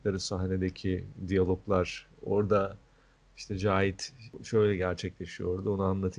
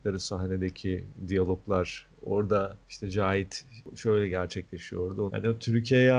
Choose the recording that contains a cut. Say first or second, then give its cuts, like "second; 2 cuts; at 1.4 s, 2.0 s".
second; 2 cuts; at 2.8 s, 5.3 s